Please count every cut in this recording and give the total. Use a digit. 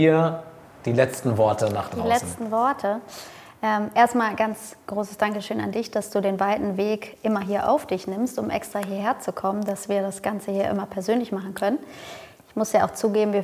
0